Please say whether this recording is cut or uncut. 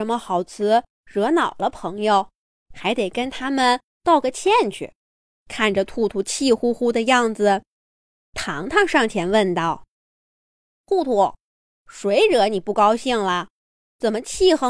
cut